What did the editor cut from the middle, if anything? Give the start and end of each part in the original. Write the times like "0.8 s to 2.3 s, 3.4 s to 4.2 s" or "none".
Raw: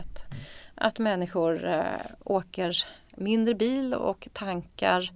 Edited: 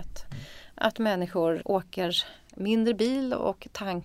1.6 s to 2.2 s